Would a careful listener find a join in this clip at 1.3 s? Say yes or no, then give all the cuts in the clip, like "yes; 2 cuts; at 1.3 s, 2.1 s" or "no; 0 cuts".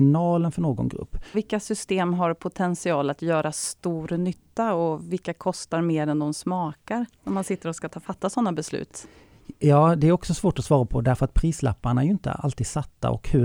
yes; 1 cut; at 1.3 s